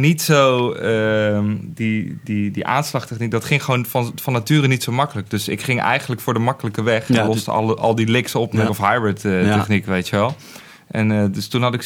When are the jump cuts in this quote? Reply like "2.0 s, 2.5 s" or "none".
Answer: 8.7 s